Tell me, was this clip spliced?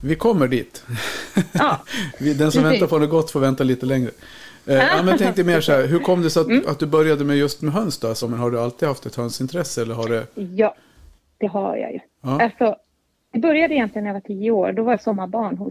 yes; 1 cut; at 8.2 s

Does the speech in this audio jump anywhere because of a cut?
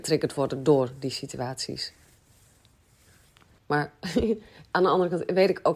yes; 1 cut; at 3.6 s

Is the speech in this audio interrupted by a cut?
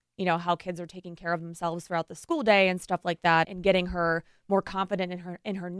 yes; 1 cut; at 3.4 s

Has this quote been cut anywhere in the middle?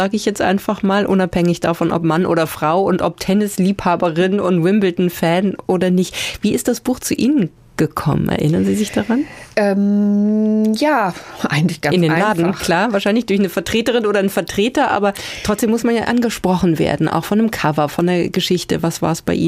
no; 0 cuts

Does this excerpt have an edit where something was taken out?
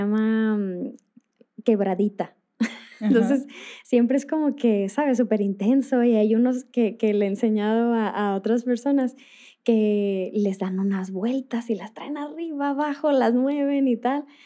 no; 0 cuts

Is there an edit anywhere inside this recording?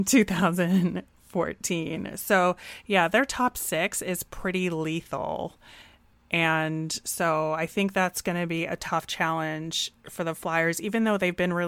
no; 0 cuts

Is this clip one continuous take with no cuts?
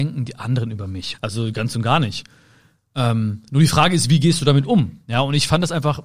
no; 1 cut; at 1.1 s

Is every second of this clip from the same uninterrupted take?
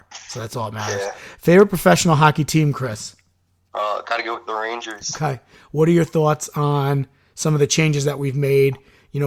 yes; 0 cuts

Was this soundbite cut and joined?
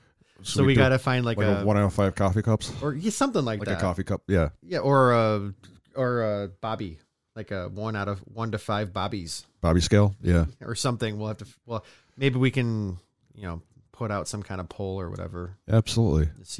no; 0 cuts

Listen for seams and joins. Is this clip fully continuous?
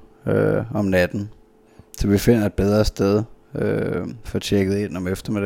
yes; 0 cuts

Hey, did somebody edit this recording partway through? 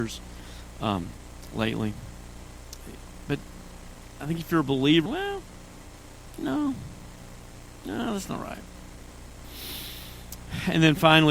yes; 1 cut; at 5.1 s

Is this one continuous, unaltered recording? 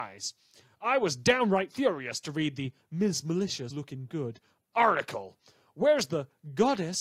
no; 1 cut; at 3.7 s

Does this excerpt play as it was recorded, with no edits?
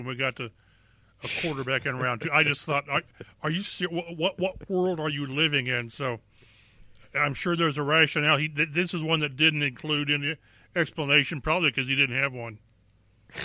yes; 0 cuts

